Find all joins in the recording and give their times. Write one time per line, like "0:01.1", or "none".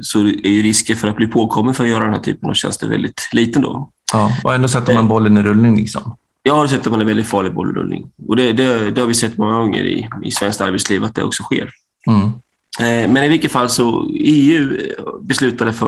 none